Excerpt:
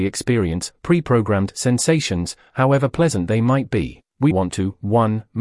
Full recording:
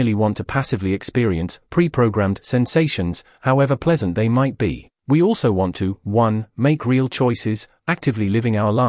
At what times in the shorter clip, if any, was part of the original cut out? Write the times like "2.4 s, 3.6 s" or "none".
4.3 s